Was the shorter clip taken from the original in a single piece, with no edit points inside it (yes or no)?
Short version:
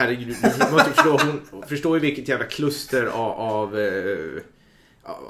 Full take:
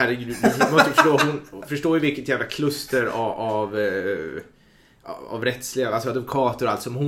yes